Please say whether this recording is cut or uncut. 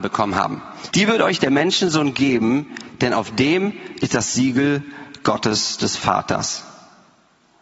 cut